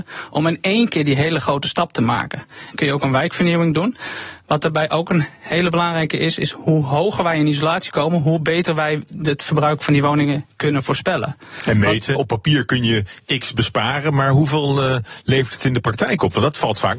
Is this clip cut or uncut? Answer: cut